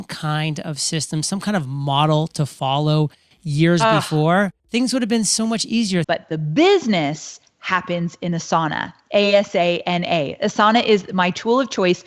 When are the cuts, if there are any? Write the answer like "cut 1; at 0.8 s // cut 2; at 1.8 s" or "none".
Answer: cut 1; at 4.6 s // cut 2; at 6.0 s